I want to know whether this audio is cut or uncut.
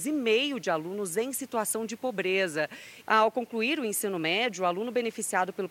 cut